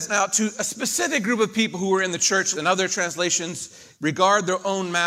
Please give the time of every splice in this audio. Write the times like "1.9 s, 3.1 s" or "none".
2.5 s, 3.9 s

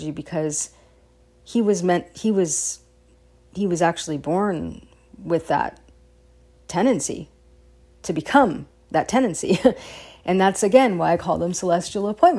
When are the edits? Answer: none

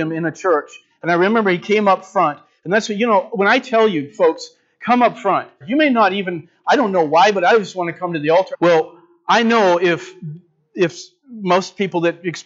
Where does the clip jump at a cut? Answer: 5.6 s, 8.5 s

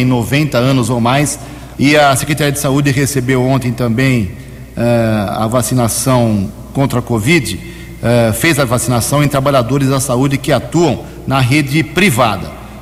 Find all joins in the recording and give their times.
1.8 s

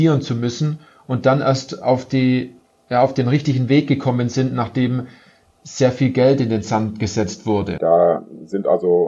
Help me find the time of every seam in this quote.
7.8 s

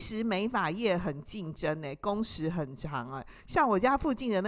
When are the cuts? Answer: none

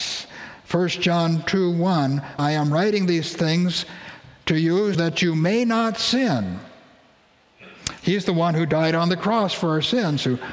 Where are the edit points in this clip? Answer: 2.4 s, 4.9 s, 8.0 s

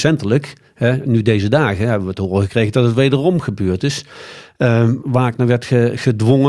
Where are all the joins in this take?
5.0 s

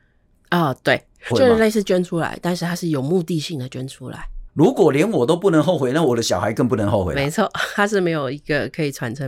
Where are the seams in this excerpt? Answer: 1.3 s, 4.5 s

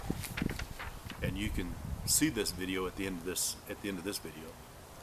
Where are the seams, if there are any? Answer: 1.2 s, 3.6 s

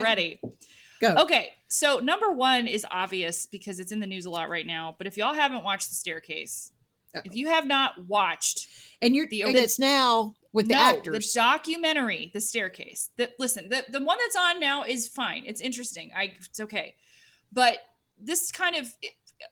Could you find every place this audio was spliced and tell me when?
9.5 s

